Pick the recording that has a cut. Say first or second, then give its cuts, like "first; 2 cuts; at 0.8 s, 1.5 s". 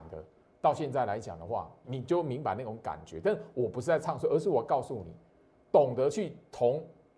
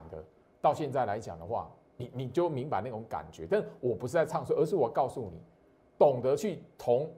first; 1 cut; at 1.8 s